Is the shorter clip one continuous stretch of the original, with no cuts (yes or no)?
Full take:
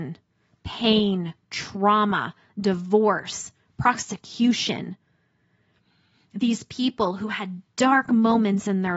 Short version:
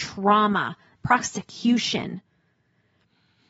no